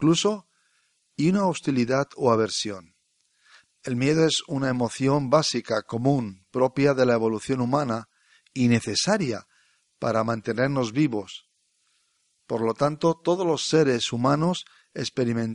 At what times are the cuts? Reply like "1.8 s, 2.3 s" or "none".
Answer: 3.6 s